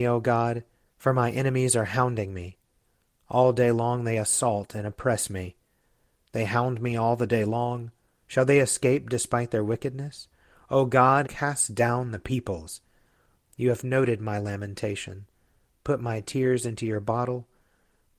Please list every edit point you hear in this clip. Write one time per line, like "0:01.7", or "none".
0:08.2
0:11.2